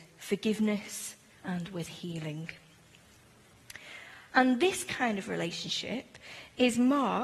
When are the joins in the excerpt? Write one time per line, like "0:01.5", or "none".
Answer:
0:01.4
0:04.3